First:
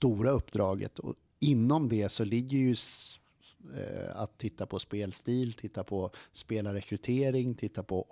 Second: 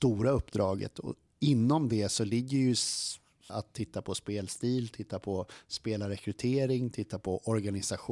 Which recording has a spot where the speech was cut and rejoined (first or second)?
second